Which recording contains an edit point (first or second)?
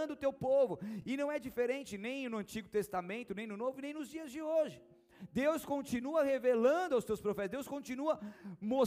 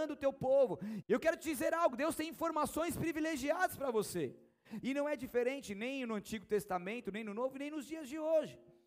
second